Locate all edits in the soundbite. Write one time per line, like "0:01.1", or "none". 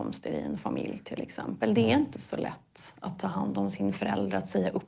none